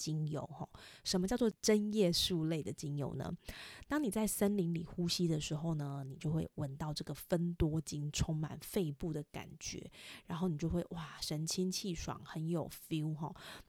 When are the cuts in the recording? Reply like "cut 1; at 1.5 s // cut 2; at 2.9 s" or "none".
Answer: none